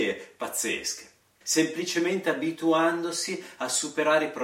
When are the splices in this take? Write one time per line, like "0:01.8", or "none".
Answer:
0:01.4